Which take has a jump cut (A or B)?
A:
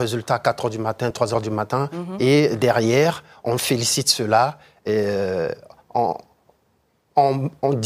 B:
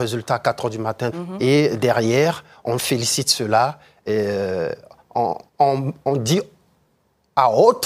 B